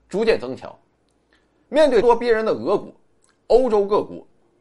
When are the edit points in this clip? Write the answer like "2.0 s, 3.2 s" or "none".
2.0 s